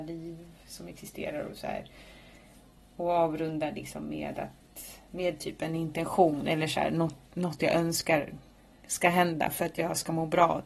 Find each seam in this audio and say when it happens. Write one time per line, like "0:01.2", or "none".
none